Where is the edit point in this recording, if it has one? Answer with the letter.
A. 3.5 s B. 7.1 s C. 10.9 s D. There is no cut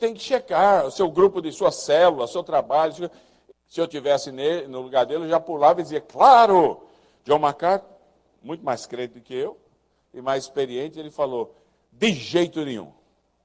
A